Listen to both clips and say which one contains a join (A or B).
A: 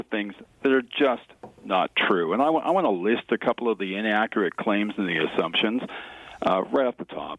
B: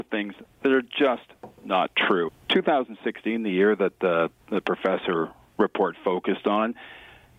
B